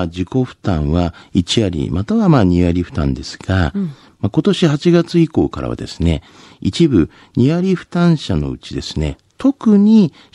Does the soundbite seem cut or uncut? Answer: uncut